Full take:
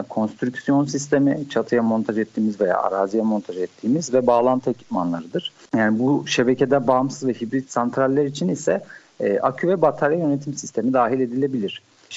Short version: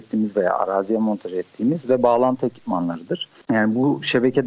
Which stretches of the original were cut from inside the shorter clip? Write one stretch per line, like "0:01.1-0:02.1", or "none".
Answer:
none